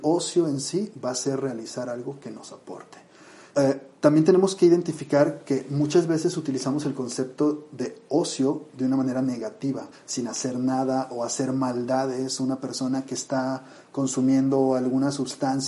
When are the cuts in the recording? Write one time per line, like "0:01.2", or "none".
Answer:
0:03.5
0:09.9